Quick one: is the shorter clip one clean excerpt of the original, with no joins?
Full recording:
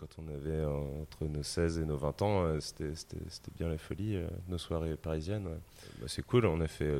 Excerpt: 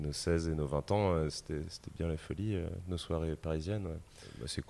no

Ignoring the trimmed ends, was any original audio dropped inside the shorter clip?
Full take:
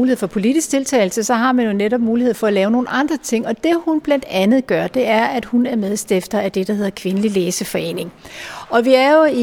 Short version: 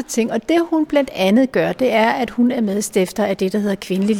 no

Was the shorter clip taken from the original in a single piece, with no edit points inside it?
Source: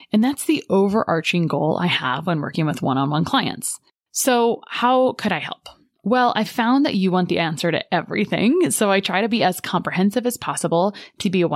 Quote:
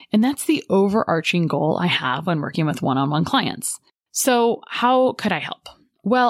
yes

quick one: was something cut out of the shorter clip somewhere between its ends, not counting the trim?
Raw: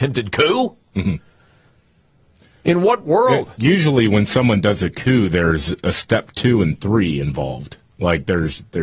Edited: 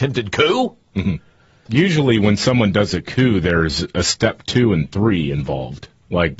yes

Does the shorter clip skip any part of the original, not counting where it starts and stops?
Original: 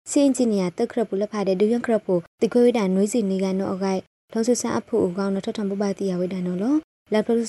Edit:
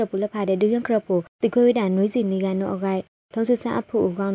no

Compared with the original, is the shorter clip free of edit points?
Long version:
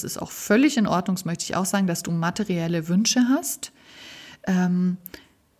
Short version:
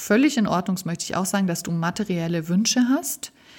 yes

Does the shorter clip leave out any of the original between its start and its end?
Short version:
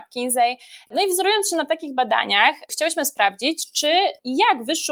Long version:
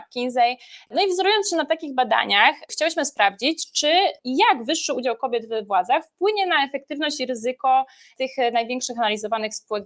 no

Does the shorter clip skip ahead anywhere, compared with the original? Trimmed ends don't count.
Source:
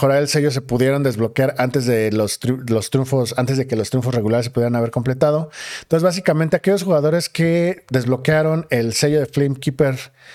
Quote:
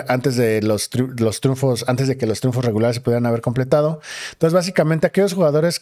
no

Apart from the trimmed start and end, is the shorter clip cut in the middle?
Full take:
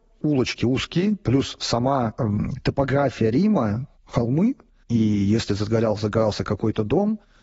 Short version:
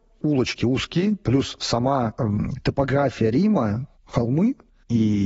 no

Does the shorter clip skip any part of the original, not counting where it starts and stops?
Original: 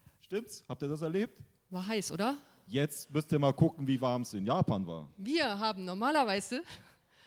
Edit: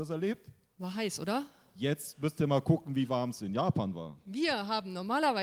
no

